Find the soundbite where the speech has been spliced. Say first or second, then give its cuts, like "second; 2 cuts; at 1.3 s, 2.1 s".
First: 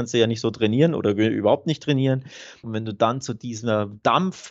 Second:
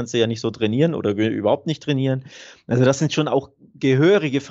first; 1 cut; at 2.6 s